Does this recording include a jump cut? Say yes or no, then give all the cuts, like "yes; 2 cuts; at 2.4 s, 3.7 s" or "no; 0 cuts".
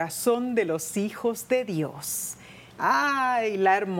yes; 1 cut; at 2.7 s